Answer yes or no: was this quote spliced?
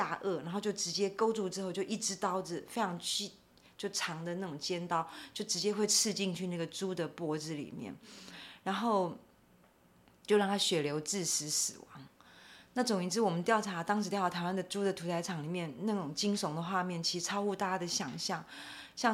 no